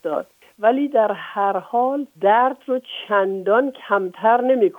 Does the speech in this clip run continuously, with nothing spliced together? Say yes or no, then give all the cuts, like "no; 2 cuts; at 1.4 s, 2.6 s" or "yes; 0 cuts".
no; 1 cut; at 2.1 s